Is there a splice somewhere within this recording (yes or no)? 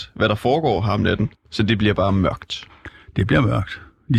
yes